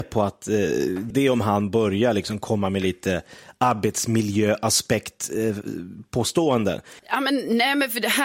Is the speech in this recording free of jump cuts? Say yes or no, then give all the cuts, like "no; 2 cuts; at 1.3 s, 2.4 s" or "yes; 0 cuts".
no; 2 cuts; at 1.1 s, 7.0 s